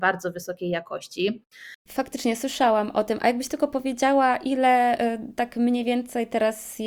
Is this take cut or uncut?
uncut